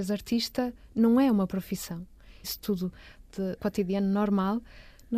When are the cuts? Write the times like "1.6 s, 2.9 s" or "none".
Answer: 2.4 s, 3.6 s